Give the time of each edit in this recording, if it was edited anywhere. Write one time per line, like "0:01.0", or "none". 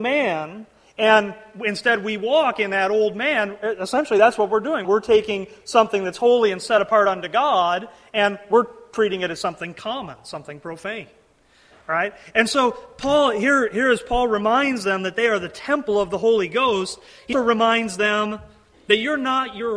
0:04.8
0:17.3